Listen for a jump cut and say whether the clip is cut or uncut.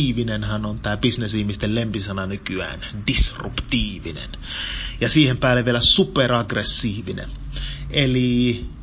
uncut